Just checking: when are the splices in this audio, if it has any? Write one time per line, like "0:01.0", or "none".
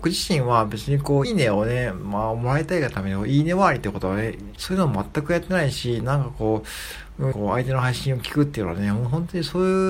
0:01.2
0:04.6
0:07.3